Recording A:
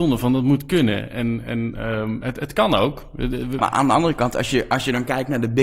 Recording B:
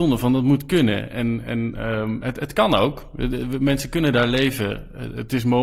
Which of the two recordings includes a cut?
A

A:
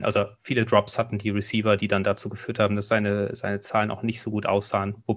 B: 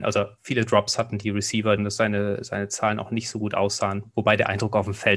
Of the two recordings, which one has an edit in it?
B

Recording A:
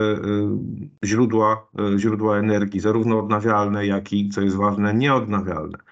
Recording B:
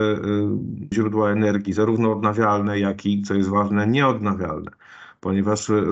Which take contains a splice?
B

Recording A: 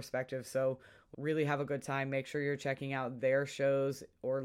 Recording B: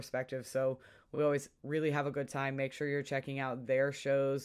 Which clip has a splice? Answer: A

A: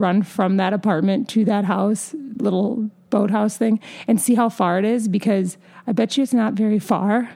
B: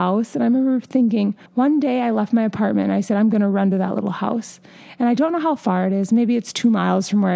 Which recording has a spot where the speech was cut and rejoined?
B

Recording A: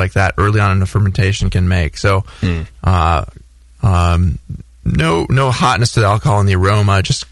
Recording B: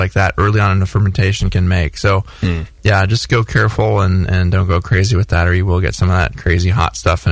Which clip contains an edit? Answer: A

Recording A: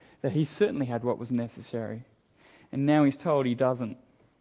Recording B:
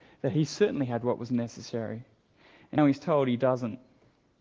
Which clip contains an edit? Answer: B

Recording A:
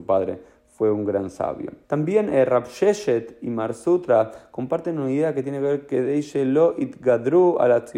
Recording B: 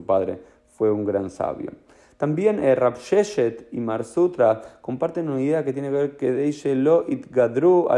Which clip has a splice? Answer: A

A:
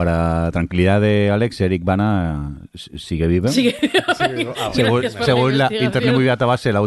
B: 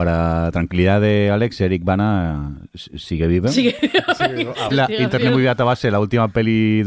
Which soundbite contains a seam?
B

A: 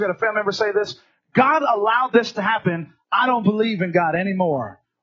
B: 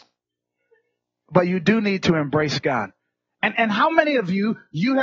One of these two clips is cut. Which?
B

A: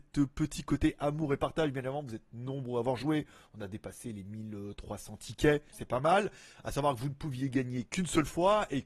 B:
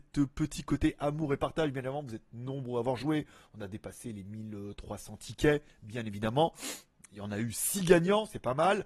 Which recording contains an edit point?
A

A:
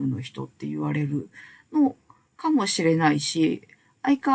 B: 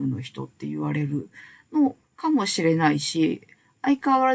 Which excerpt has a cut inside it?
B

